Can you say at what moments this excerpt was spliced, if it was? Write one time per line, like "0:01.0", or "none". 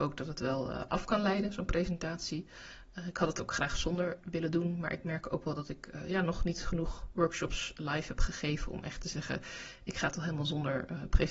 none

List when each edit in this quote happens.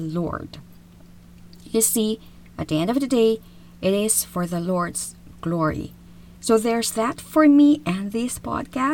0:06.3

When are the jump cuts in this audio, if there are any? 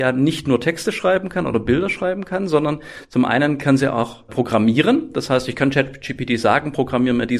0:04.3

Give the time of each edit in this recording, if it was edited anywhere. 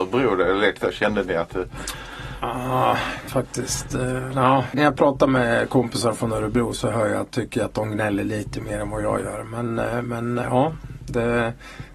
0:03.3
0:04.7

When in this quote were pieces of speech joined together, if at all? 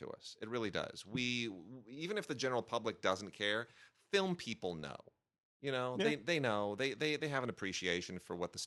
none

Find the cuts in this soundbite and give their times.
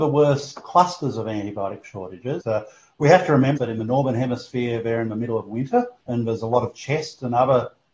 0:02.4
0:03.6
0:06.0

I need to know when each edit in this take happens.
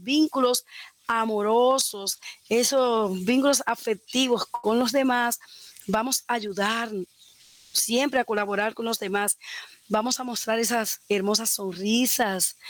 none

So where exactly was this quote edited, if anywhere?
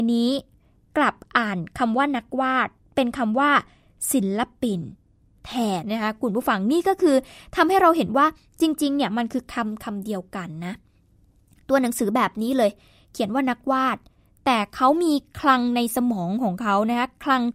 0:05.8

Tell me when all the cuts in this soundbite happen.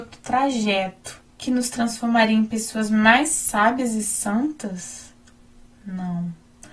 0:01.3

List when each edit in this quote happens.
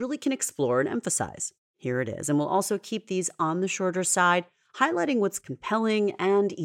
0:01.7

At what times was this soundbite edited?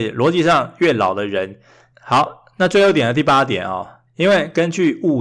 0:01.9
0:04.1

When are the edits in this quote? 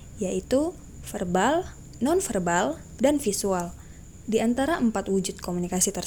0:03.0

